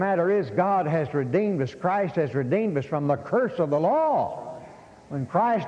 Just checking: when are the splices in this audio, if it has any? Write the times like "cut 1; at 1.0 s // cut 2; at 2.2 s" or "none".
none